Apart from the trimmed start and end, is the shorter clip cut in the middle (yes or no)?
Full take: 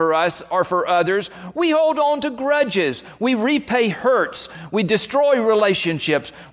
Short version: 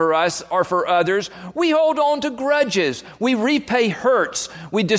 no